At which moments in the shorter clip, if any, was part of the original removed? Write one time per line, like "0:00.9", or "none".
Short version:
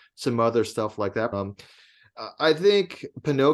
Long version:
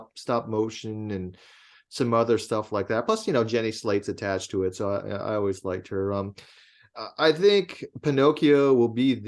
0:01.3